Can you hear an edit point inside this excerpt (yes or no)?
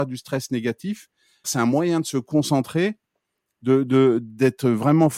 yes